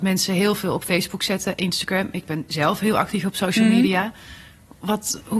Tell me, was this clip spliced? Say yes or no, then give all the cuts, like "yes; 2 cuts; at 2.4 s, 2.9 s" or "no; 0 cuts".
no; 0 cuts